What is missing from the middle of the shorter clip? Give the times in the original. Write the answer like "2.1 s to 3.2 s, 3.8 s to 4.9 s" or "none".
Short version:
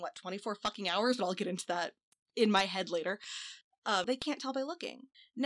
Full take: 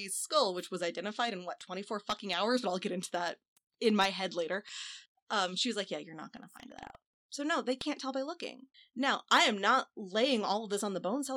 5.5 s to 7.6 s

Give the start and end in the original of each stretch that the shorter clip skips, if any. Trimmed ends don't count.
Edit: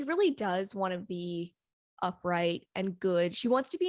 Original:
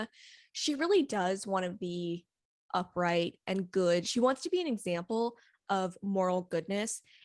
none

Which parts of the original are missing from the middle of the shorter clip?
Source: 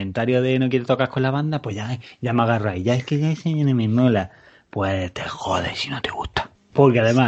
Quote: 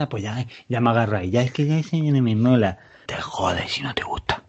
4.6 s to 5.1 s

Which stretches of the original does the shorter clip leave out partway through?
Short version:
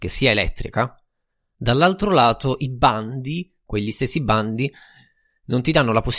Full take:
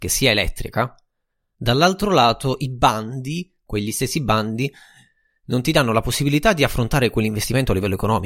none

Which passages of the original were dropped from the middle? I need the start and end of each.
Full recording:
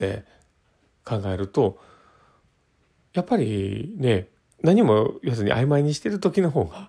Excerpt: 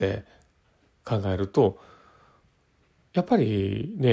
none

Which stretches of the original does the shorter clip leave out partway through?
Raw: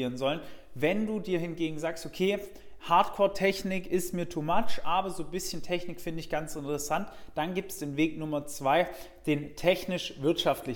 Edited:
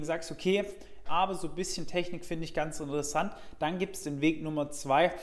2.8 s to 4.8 s

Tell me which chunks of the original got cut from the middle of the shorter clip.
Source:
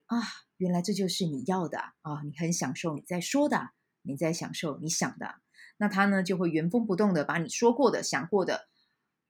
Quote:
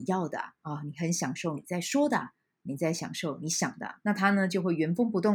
5.4 s to 5.7 s

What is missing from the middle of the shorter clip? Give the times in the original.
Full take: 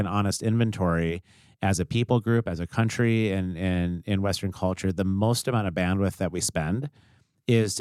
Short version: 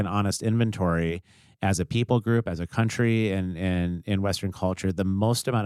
none

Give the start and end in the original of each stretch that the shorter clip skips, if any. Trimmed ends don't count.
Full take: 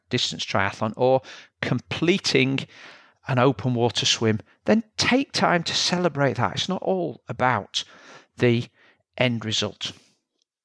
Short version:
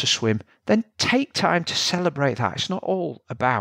none

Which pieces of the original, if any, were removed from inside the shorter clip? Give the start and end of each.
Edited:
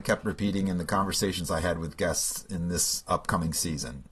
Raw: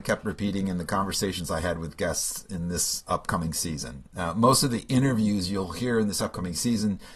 none

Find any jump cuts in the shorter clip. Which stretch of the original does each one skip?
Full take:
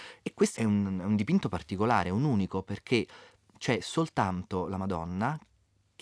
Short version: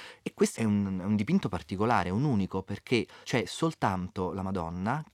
3.2 s to 3.6 s

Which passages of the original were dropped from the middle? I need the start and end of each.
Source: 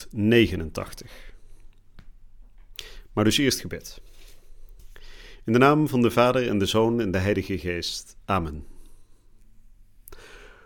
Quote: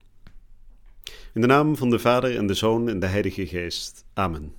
3.0 s to 5.4 s

